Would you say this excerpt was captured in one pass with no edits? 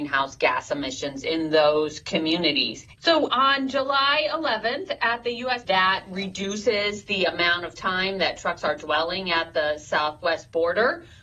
no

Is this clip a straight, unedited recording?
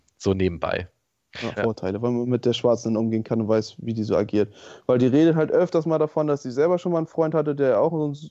no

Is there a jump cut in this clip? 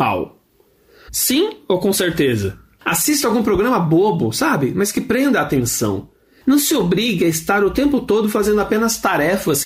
yes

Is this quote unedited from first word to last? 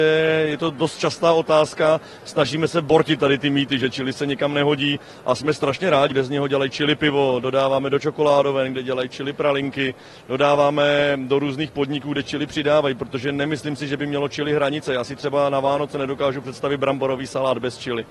no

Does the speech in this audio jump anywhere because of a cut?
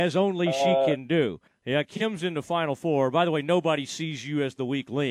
yes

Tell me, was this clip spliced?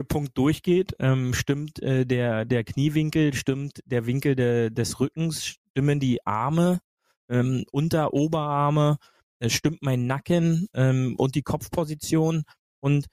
no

